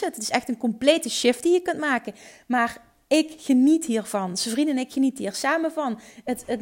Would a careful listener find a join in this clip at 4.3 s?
no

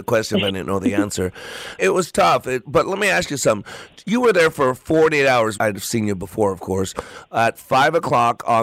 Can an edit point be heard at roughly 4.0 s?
no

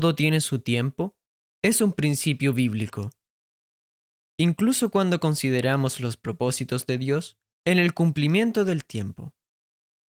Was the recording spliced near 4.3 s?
no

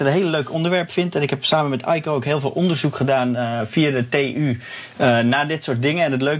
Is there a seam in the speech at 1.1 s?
no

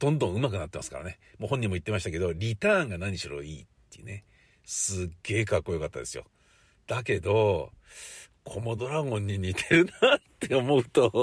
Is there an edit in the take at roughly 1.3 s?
no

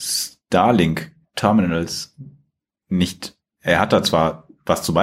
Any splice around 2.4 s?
no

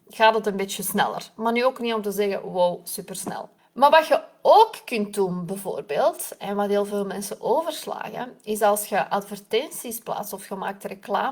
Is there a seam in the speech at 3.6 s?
yes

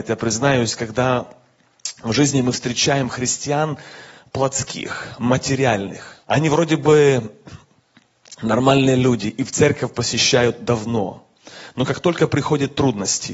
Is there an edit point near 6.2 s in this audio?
yes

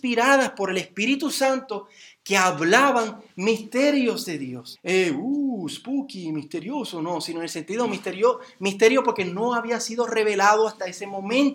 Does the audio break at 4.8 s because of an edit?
yes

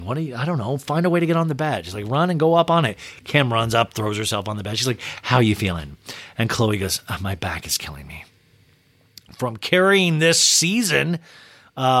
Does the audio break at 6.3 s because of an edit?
no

